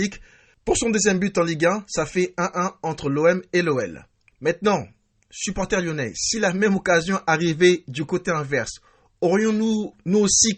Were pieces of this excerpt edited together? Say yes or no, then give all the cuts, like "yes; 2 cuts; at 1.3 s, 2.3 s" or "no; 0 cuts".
yes; 1 cut; at 4.3 s